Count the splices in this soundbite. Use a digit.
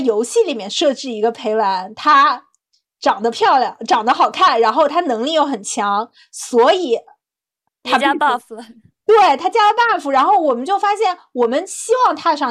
0